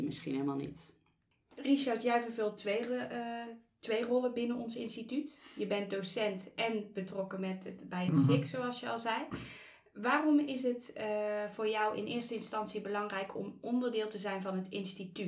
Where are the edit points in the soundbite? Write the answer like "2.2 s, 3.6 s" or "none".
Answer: none